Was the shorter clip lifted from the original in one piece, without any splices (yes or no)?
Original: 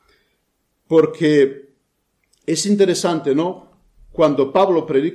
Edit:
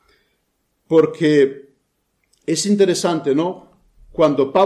yes